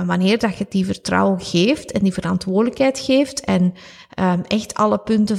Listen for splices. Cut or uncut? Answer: uncut